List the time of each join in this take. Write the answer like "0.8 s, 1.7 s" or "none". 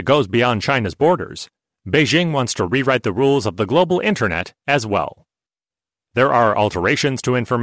6.0 s

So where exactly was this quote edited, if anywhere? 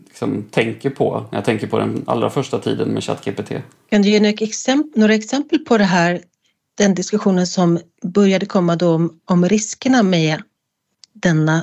none

